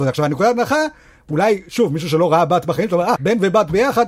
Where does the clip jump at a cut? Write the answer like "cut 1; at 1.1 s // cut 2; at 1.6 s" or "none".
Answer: cut 1; at 3.2 s